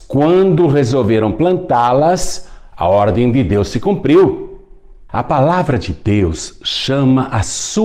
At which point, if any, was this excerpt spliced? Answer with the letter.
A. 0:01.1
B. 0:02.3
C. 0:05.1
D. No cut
C